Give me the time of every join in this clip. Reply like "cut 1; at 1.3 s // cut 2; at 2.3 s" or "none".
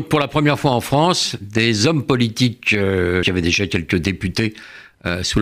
cut 1; at 3.2 s

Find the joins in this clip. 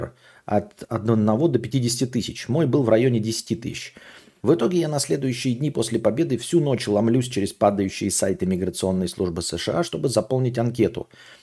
cut 1; at 4.4 s

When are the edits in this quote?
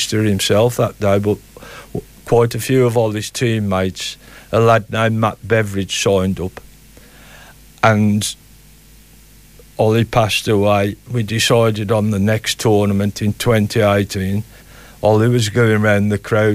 cut 1; at 14.6 s

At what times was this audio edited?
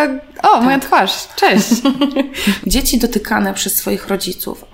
cut 1; at 2.6 s

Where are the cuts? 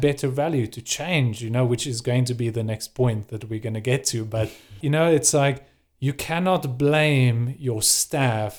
cut 1; at 4.8 s

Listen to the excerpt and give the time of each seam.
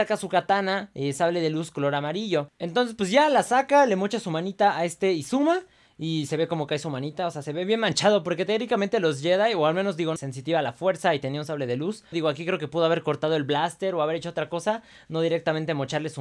cut 1; at 10.2 s // cut 2; at 12.1 s

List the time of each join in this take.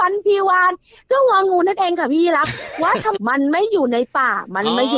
cut 1; at 3.2 s

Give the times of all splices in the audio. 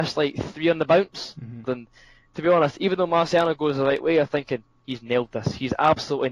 cut 1; at 1.6 s

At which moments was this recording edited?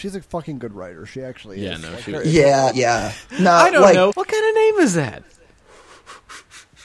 cut 1; at 2.7 s // cut 2; at 4.1 s

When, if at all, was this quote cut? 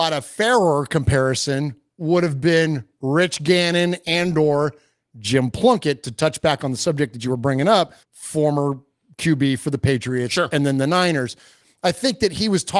cut 1; at 8.0 s

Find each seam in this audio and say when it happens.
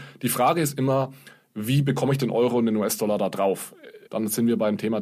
cut 1; at 4.1 s

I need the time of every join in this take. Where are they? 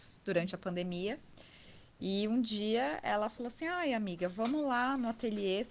none

